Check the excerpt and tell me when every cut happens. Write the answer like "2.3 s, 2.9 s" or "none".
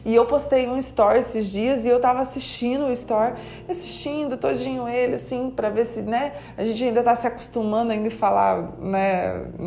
none